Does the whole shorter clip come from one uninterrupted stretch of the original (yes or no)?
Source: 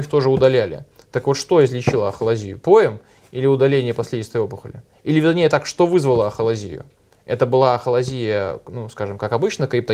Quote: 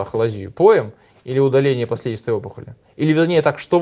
yes